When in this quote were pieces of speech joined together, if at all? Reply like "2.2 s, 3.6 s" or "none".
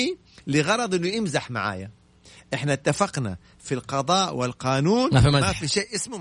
none